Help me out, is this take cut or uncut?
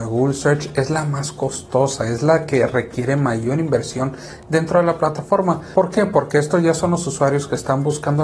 uncut